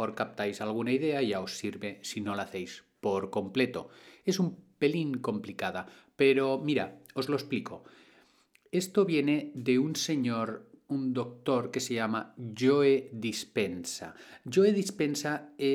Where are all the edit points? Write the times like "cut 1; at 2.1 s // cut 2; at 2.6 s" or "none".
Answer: none